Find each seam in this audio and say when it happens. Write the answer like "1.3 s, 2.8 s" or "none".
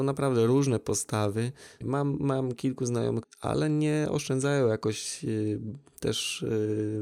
1.8 s, 3.2 s